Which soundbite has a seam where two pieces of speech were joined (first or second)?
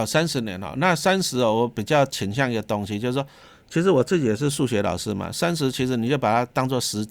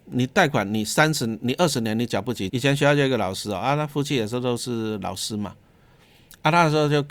second